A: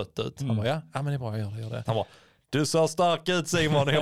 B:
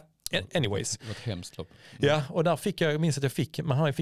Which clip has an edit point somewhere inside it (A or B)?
A